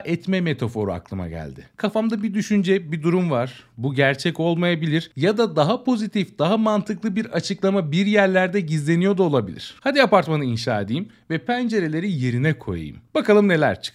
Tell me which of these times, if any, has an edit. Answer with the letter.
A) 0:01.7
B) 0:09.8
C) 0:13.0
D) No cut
B